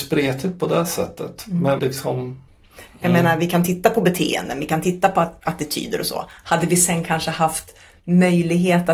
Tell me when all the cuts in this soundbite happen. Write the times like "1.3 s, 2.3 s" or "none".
1.8 s, 2.9 s